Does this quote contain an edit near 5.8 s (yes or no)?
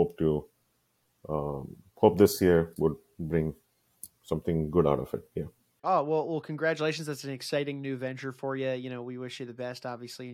yes